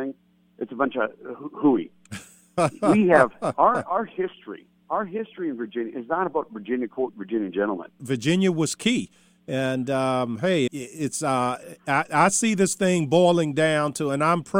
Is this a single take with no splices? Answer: no; 2 cuts; at 8.0 s, 10.7 s

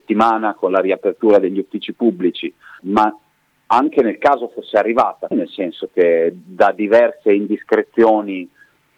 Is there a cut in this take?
yes; 2 cuts; at 2.8 s, 5.3 s

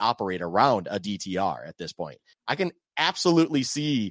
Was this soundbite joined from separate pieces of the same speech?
yes; 1 cut; at 2.3 s

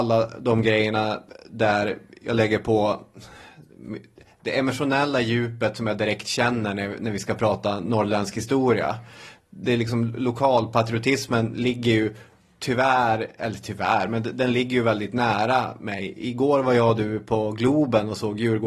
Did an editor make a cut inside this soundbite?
no; 0 cuts

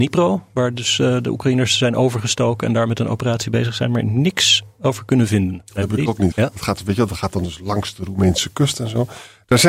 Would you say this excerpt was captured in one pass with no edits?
no; 1 cut; at 6.3 s

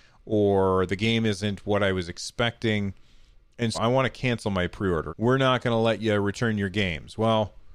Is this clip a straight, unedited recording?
no; 2 cuts; at 3.7 s, 5.1 s

